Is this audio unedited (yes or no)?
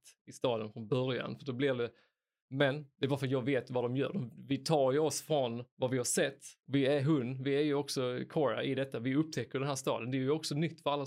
yes